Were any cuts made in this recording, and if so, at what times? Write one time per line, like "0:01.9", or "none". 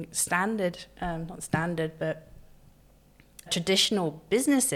0:03.5